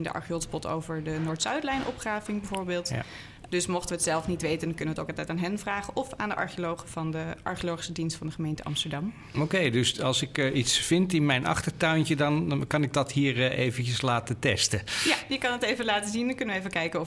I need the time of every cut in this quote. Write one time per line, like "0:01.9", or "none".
0:03.5